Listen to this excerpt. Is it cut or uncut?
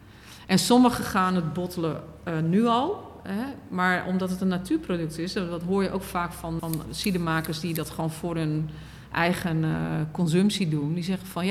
cut